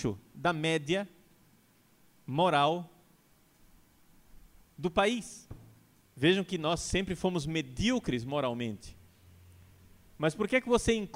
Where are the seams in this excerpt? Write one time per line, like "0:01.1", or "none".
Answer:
0:06.0